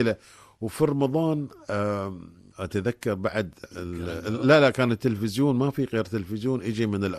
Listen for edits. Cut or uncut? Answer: cut